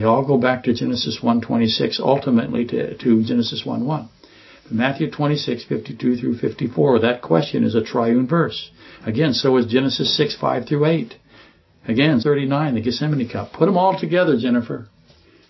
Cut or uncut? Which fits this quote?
cut